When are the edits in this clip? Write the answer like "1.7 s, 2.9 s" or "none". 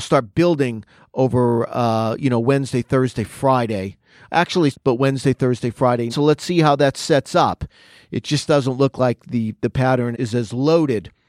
4.7 s, 6.1 s, 10.1 s